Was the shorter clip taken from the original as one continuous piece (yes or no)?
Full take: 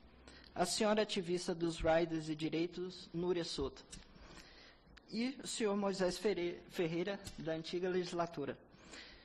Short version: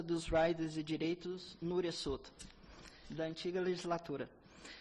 no